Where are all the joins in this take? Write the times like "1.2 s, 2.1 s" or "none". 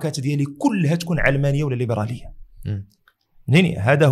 none